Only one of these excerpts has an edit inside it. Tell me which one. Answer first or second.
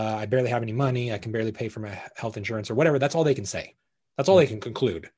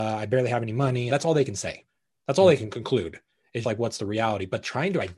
second